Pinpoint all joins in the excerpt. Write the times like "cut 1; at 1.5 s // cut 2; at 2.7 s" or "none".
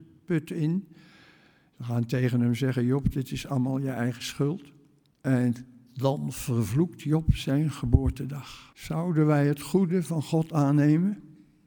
cut 1; at 5.1 s // cut 2; at 8.7 s